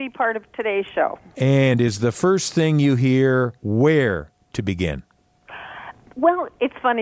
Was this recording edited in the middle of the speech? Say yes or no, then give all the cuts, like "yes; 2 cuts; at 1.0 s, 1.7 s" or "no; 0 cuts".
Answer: yes; 1 cut; at 3.6 s